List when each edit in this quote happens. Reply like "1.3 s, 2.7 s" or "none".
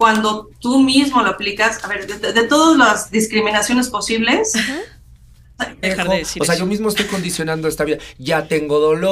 5.8 s

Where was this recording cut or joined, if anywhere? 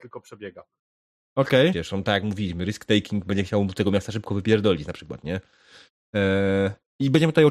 1.7 s

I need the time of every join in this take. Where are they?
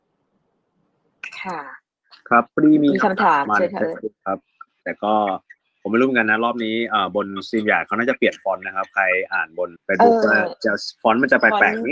3.4 s, 9.8 s

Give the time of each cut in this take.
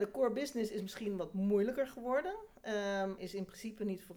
3.2 s

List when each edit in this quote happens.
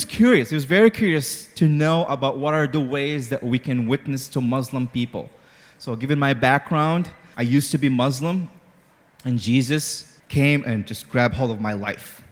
7.3 s, 10.2 s

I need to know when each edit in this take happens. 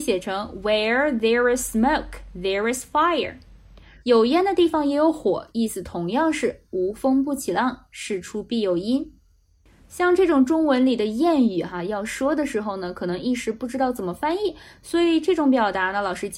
4.0 s

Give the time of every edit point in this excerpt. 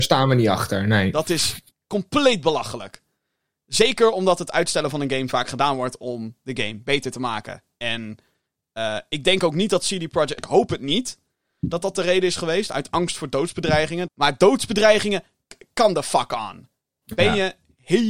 10.4 s, 14.1 s

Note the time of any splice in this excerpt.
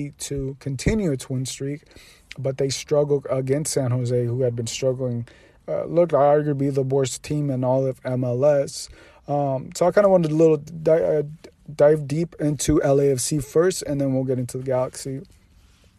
none

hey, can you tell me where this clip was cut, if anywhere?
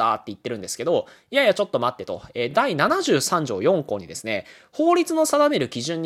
none

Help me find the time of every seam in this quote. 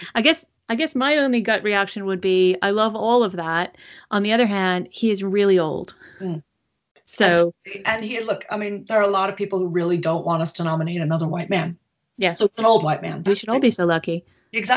13.3 s

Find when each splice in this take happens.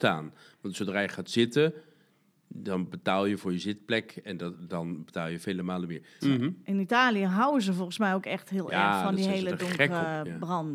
6.2 s

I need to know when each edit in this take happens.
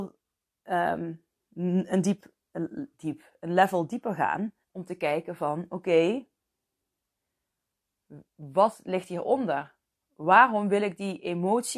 4.6 s

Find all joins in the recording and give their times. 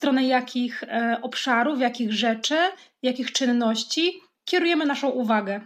none

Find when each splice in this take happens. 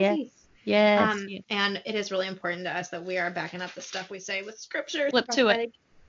1.4 s, 5.1 s

